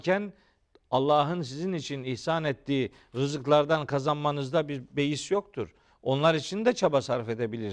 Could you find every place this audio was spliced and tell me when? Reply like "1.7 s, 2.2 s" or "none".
none